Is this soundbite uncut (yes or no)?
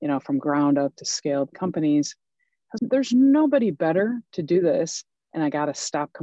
no